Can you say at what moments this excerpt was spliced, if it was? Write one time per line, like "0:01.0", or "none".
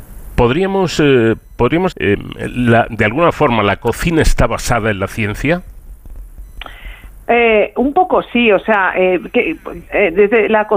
0:01.9

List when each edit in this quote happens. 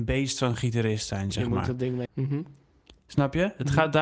0:02.1

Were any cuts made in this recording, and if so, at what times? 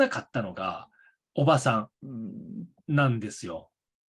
0:01.9

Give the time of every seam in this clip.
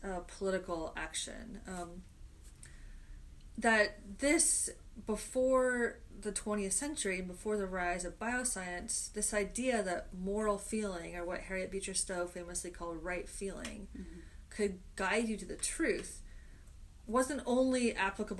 none

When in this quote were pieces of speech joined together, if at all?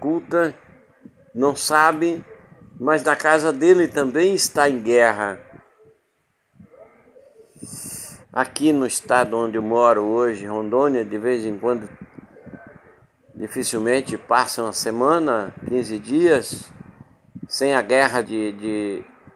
0:08.2
0:18.2

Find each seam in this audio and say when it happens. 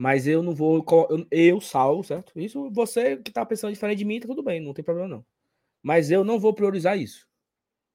none

